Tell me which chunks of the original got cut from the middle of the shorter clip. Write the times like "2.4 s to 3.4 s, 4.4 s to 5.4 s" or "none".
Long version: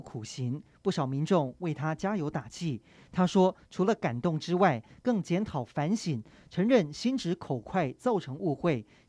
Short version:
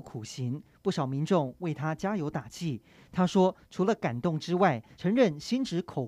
4.9 s to 6.5 s